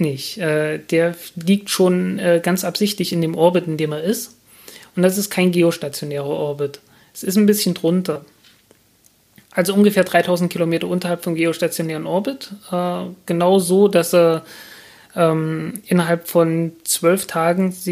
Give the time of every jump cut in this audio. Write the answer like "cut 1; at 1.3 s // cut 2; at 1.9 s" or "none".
none